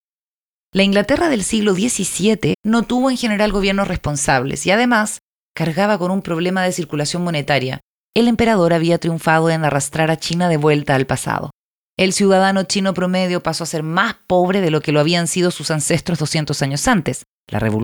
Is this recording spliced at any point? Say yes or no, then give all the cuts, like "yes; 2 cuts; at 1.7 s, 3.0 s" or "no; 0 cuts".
yes; 2 cuts; at 2.5 s, 8.0 s